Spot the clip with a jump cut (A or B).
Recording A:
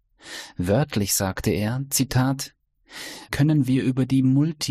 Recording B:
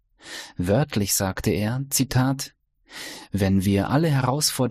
A